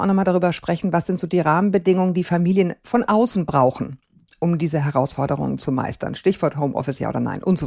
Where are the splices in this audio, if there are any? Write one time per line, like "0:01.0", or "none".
none